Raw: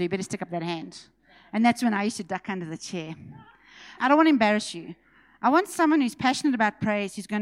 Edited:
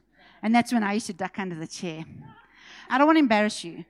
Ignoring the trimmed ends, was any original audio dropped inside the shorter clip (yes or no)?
no